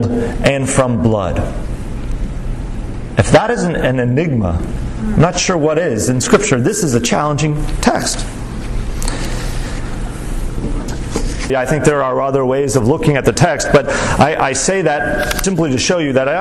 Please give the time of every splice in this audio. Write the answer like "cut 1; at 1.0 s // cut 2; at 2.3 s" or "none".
cut 1; at 11.5 s // cut 2; at 15.4 s